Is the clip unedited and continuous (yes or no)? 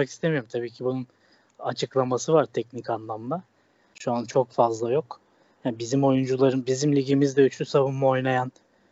no